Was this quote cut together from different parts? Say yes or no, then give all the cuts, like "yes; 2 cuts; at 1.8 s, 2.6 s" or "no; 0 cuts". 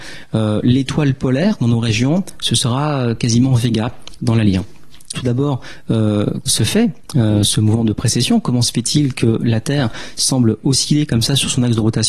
yes; 2 cuts; at 5.1 s, 6.5 s